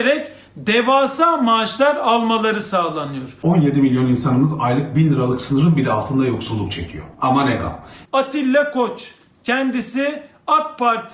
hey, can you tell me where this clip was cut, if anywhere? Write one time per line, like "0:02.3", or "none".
0:08.0